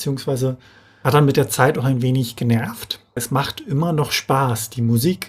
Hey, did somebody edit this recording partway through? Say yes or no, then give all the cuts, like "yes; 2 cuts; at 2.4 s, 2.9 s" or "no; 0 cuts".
yes; 1 cut; at 3.2 s